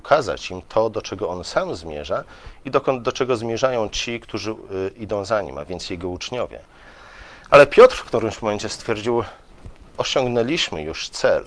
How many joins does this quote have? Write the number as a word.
zero